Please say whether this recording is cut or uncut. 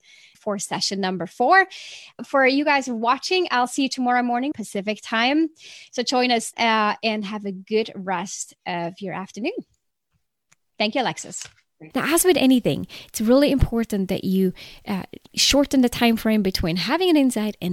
cut